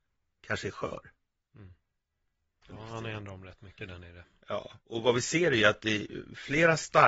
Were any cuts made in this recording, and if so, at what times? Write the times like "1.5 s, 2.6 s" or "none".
2.6 s, 4.8 s